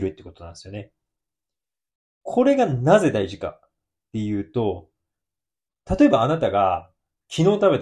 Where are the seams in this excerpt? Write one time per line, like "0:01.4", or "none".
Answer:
0:05.9